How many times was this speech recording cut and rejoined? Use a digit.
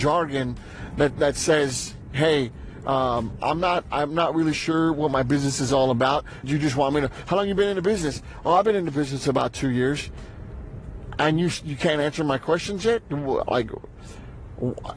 1